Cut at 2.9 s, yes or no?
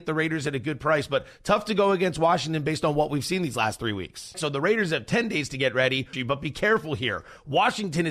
no